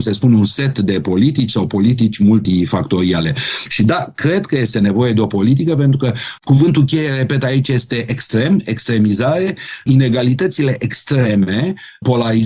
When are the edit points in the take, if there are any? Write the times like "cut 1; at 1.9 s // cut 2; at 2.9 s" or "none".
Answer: none

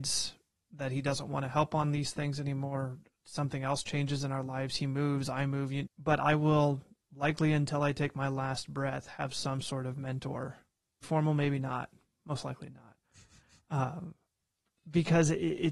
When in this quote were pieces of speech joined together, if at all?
cut 1; at 5.9 s // cut 2; at 11.0 s

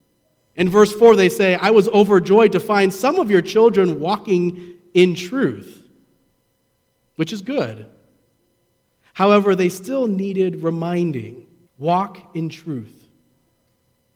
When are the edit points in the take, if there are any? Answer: cut 1; at 11.7 s

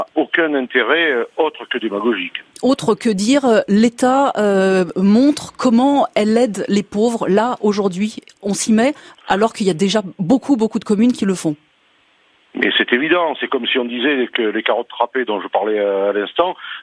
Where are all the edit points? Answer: none

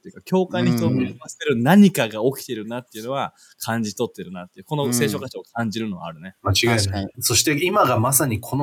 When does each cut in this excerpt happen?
cut 1; at 7.1 s

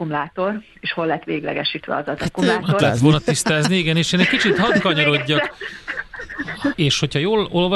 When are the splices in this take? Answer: cut 1; at 2.8 s // cut 2; at 6.7 s

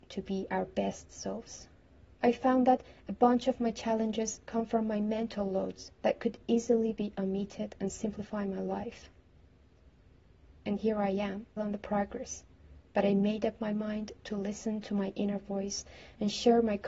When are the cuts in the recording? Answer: cut 1; at 2.1 s // cut 2; at 11.6 s

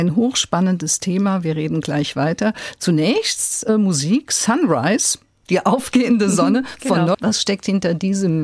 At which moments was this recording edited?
cut 1; at 5.5 s // cut 2; at 7.1 s

